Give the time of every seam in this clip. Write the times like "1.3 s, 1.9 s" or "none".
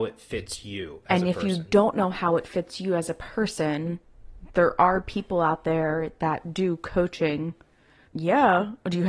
8.1 s